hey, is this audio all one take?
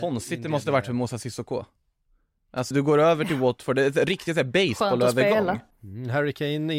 no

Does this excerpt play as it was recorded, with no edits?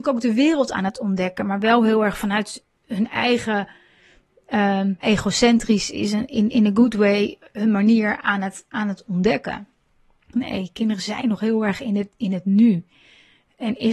no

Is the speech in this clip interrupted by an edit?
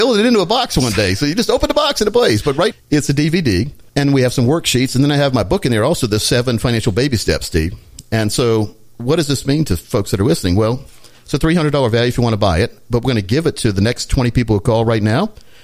yes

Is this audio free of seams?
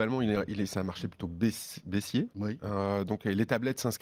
yes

